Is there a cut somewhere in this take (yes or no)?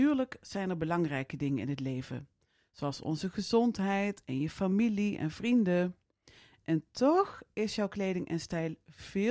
no